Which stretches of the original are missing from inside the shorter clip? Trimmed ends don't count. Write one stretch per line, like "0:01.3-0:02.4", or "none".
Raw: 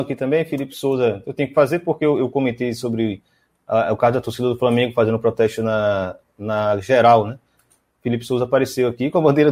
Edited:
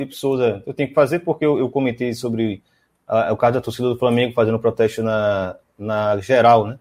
none

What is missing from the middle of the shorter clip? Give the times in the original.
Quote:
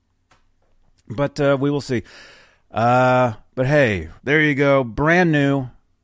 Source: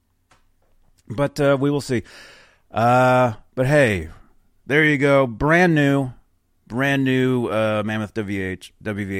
0:04.2-0:04.6

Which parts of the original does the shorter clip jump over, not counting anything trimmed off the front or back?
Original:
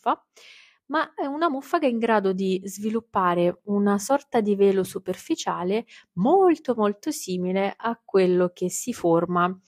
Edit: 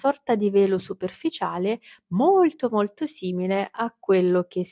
none

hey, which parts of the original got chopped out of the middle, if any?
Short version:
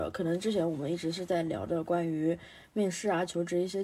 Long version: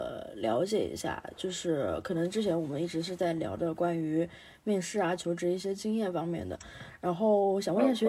none

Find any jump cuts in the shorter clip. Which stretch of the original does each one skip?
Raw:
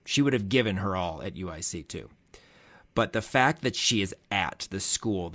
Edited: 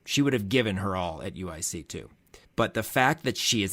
0:02.4-0:02.8

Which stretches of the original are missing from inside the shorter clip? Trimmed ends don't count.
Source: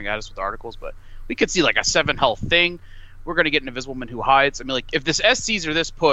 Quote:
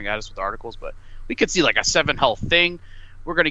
none

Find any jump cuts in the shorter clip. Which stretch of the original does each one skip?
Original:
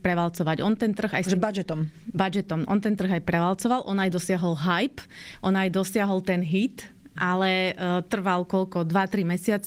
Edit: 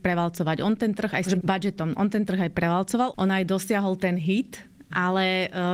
0:01.4-0:02.1
0:03.8-0:05.4

